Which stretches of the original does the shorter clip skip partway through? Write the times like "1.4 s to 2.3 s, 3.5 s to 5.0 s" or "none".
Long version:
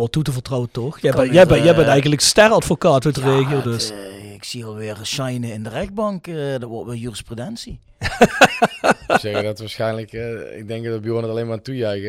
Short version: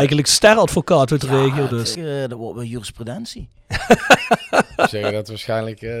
3.9 s to 6.3 s